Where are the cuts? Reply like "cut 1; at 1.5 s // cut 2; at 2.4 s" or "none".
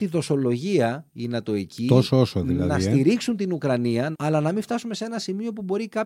cut 1; at 4.1 s